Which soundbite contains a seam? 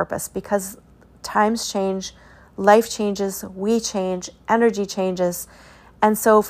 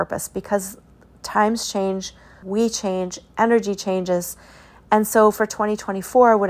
second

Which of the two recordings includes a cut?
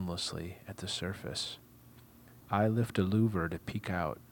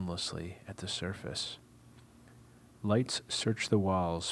first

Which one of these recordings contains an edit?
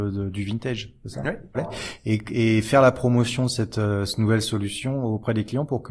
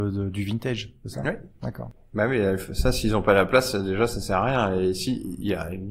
first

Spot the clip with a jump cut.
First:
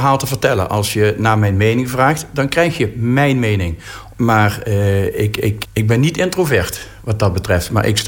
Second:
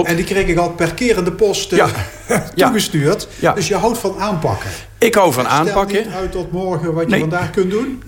first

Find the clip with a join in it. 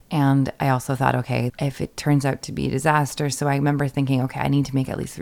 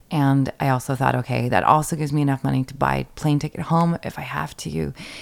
first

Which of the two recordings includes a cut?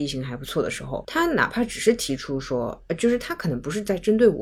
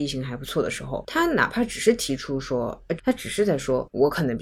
second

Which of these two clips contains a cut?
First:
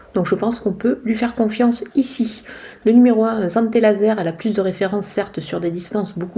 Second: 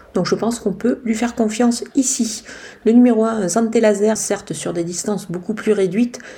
second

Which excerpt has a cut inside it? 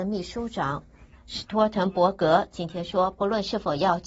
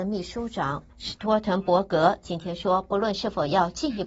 second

